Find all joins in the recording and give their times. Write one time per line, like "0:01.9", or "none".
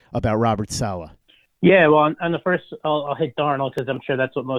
none